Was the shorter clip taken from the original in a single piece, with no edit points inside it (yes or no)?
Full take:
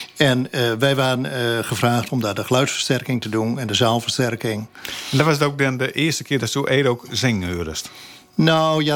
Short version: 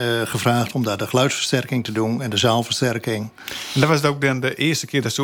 yes